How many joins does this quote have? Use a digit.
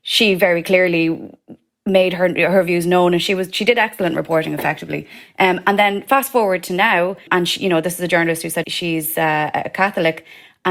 2